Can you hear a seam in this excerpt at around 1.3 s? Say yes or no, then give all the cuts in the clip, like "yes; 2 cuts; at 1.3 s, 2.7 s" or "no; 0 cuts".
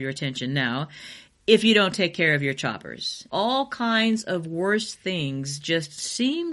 no; 1 cut; at 3.3 s